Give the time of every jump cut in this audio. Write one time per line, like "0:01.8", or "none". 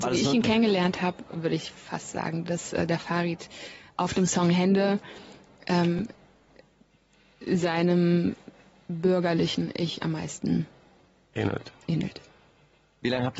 none